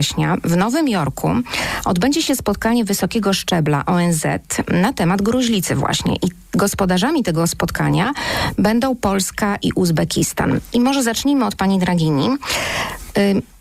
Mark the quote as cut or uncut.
uncut